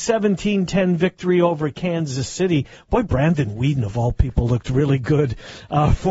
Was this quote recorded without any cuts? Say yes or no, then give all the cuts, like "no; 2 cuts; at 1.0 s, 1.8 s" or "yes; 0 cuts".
yes; 0 cuts